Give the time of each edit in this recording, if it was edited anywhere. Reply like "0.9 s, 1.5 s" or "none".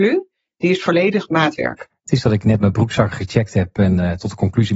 1.9 s